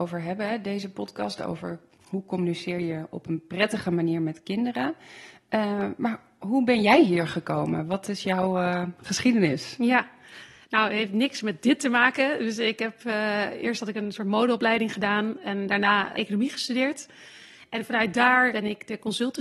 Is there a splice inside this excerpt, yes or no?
yes